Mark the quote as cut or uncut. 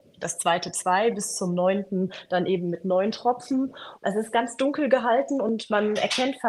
uncut